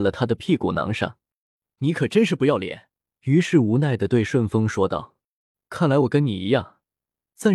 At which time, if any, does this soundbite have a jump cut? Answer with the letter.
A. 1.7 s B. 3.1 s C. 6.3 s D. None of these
B